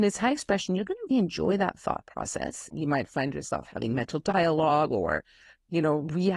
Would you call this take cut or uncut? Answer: cut